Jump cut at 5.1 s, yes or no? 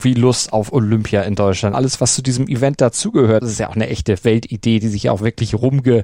no